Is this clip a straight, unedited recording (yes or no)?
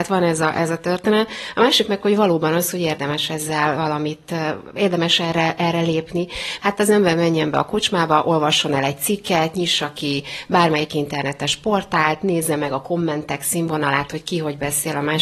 no